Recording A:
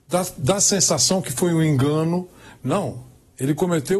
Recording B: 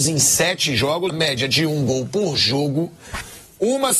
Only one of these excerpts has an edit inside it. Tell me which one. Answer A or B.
B